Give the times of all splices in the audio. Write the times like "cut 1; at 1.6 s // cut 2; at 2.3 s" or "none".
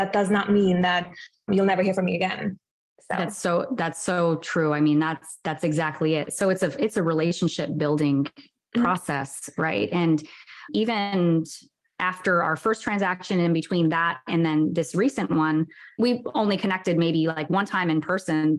none